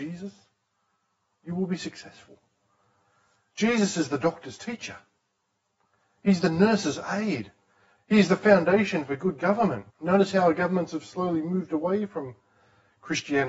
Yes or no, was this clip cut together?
yes